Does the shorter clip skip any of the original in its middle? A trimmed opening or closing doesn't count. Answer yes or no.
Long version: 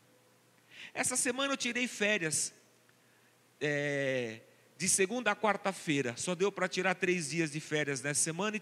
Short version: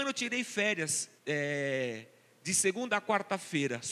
yes